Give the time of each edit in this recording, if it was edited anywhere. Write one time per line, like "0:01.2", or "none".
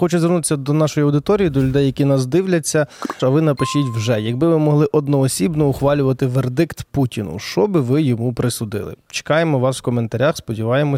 0:03.2